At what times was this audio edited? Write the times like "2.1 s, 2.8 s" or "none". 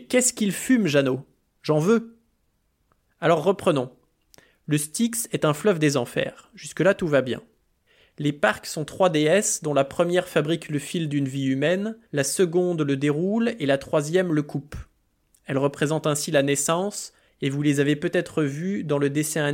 12.0 s, 17.3 s